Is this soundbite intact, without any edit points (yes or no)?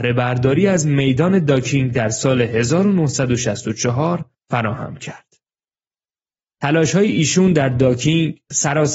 no